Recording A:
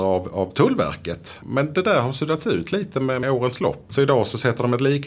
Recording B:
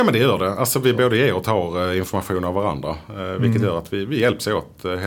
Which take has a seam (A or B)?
A